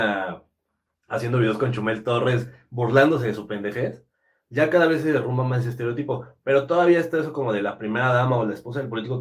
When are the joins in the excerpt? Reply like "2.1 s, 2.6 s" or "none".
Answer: none